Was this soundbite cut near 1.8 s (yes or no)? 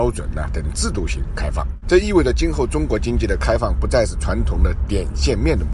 no